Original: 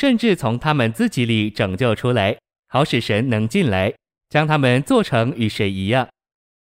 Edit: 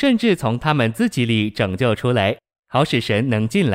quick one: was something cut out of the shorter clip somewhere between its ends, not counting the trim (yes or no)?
no